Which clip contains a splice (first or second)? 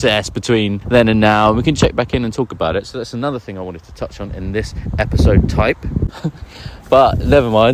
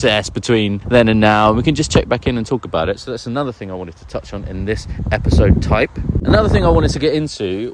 first